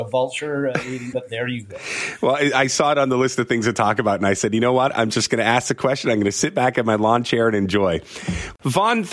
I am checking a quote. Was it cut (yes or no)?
yes